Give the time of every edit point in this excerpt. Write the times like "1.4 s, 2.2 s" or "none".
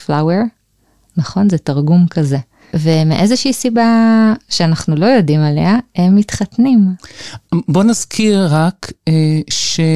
2.7 s

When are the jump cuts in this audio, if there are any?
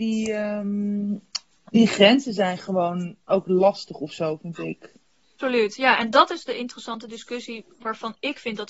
none

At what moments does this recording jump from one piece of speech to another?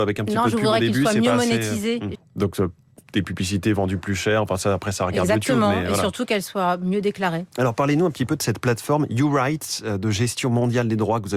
2.1 s

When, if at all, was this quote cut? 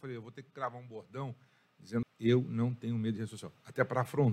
2.0 s

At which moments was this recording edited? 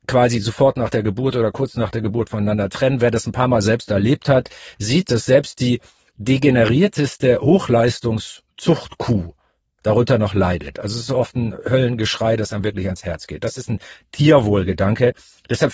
none

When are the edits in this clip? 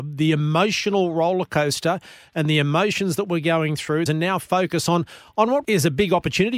4.1 s, 5.6 s

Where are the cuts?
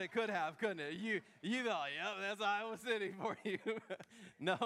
none

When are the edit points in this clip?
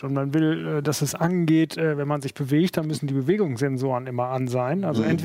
none

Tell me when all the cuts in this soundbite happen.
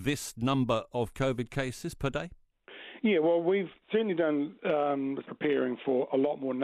5.2 s

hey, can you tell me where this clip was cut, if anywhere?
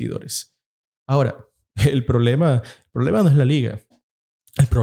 none

